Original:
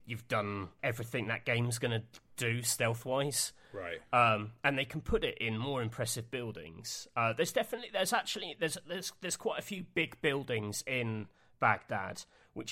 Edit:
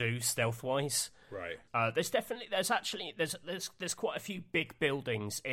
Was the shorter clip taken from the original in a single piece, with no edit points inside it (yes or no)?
no